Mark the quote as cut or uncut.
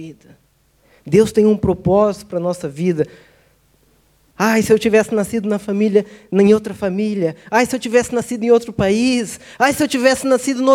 cut